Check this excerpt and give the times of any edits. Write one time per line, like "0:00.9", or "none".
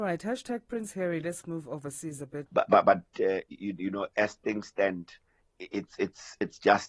0:02.5
0:05.4